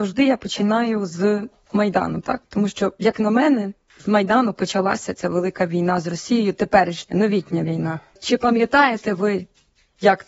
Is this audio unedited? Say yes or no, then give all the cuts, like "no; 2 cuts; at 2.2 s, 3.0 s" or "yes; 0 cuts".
yes; 0 cuts